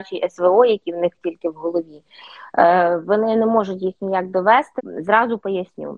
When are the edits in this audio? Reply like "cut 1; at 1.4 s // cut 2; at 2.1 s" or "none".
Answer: cut 1; at 4.8 s